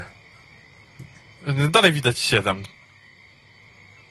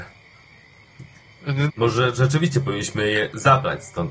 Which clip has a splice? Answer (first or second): second